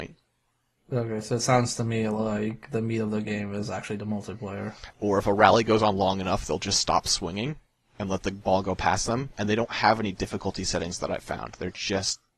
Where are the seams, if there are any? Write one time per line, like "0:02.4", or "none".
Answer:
0:04.9